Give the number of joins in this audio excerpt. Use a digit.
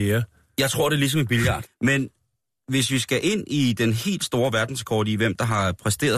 1